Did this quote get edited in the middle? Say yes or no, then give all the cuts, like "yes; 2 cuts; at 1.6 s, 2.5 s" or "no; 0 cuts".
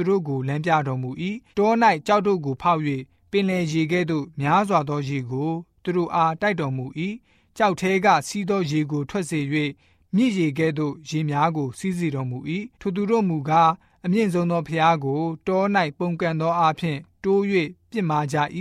yes; 2 cuts; at 1.5 s, 12.7 s